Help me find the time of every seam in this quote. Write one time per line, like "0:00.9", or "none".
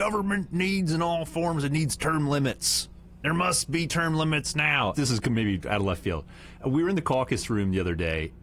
0:04.9